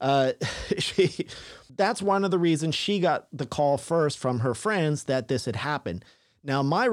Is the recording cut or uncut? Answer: uncut